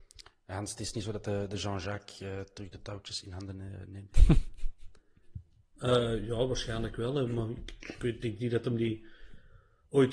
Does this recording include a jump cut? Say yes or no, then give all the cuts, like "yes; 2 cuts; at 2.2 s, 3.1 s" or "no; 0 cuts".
no; 0 cuts